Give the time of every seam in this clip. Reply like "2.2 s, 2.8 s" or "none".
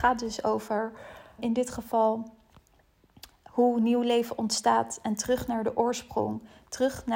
1.4 s